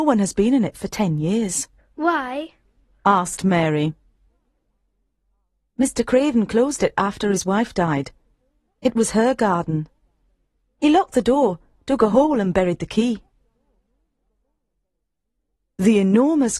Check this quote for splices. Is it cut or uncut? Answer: uncut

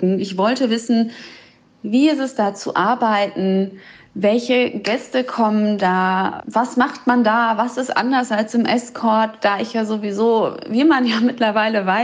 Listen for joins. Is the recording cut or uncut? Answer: uncut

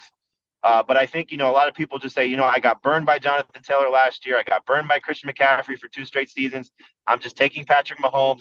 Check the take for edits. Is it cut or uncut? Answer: uncut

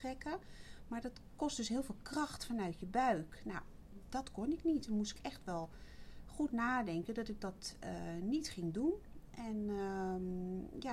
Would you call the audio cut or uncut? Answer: uncut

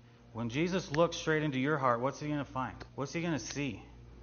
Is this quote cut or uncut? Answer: cut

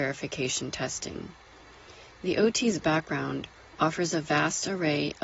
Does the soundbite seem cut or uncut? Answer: uncut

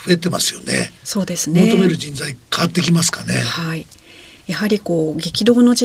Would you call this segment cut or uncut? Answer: uncut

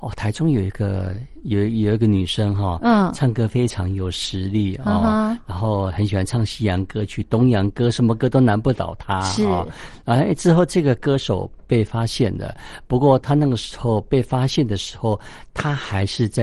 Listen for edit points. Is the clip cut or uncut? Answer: uncut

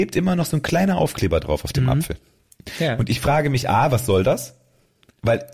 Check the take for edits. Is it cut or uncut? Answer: uncut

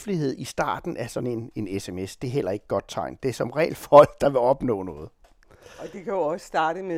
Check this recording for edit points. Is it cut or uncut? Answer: uncut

